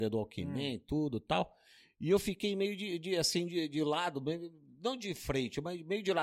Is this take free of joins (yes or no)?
yes